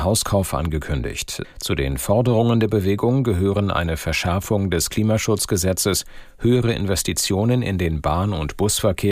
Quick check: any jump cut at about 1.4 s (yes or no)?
yes